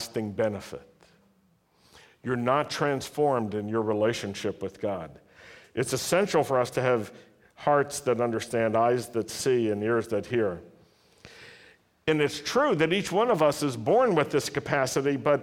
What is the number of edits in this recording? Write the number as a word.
zero